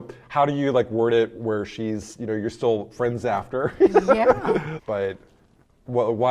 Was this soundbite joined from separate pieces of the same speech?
yes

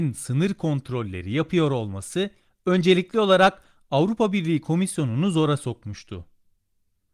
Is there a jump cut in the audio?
no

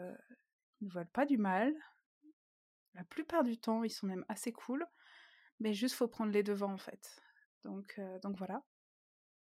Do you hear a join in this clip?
no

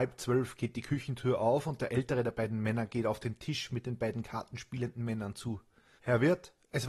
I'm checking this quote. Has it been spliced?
yes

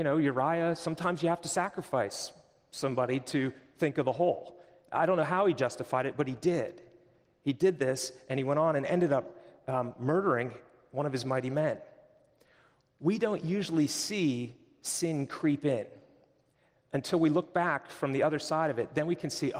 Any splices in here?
no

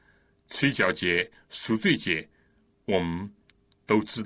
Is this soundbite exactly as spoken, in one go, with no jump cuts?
yes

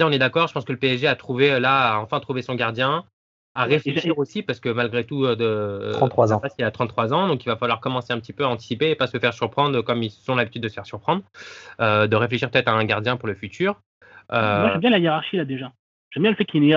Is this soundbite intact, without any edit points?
no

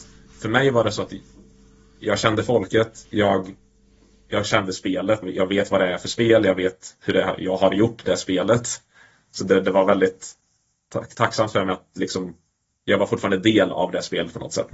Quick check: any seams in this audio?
yes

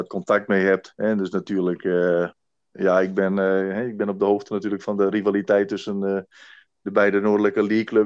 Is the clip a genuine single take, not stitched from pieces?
yes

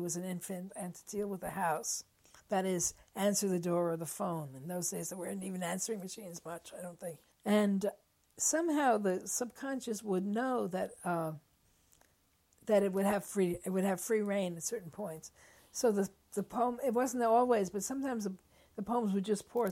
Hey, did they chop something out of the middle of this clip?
yes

